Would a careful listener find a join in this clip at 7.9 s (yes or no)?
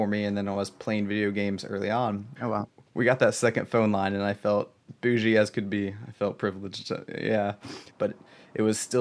yes